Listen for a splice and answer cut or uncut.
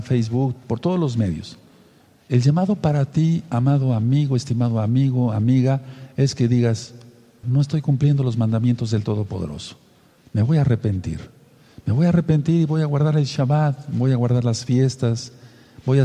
cut